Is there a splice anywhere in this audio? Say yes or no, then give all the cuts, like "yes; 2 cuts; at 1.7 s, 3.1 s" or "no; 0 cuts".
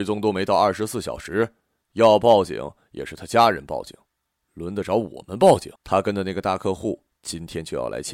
yes; 1 cut; at 5.8 s